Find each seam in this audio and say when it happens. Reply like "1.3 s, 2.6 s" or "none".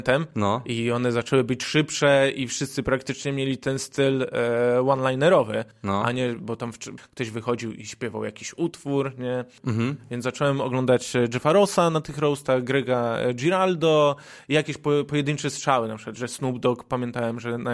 7.0 s, 9.6 s